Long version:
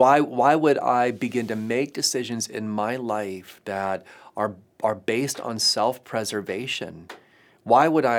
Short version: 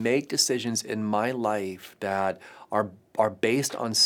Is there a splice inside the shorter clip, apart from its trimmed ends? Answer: no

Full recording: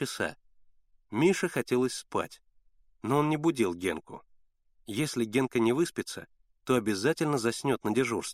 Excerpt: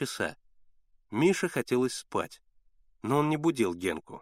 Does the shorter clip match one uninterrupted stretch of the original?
yes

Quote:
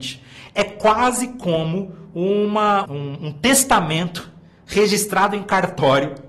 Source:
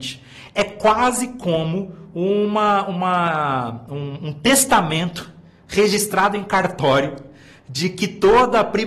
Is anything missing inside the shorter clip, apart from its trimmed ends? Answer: yes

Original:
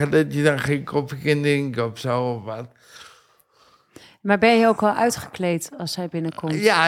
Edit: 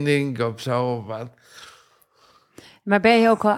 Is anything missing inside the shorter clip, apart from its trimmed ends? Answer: no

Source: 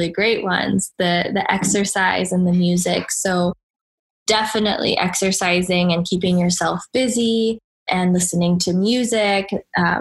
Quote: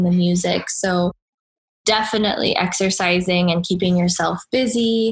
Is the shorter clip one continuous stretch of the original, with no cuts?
yes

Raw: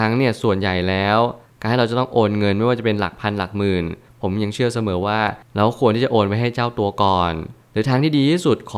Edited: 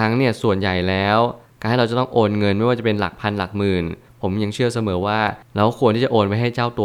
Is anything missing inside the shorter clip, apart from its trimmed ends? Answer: no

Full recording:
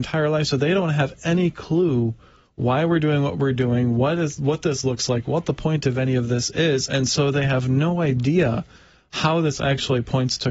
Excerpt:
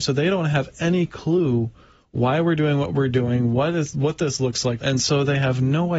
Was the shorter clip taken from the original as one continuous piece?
no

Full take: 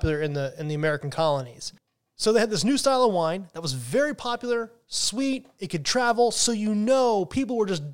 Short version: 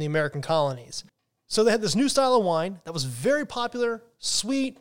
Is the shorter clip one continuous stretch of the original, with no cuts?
yes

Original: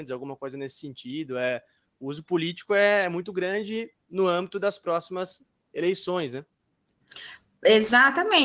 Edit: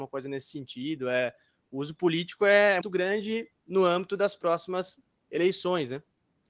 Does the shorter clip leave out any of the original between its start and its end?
yes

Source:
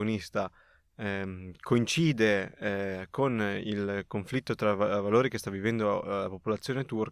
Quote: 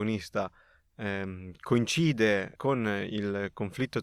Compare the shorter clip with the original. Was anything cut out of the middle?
yes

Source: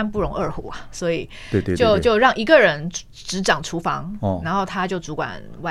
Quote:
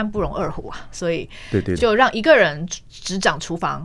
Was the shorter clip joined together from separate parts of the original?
yes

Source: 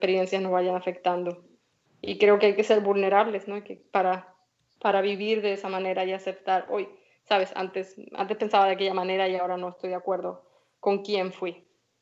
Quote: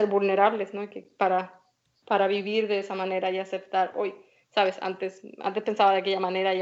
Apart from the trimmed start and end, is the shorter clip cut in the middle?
no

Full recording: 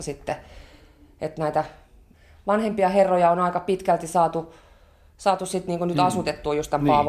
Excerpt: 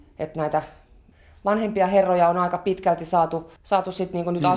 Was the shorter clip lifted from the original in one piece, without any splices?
no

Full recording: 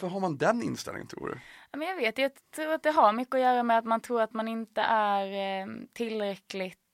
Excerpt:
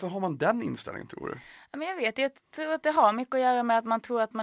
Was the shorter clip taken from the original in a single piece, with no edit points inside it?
yes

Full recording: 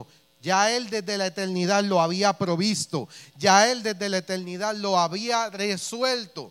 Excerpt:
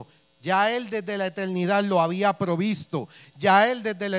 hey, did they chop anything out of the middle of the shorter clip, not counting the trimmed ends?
no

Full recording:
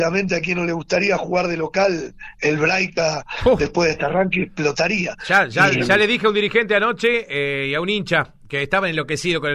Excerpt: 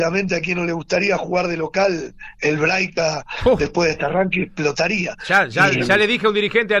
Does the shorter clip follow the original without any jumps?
yes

